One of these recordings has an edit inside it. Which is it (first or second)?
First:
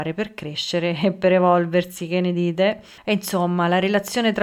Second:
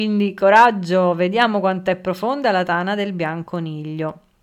first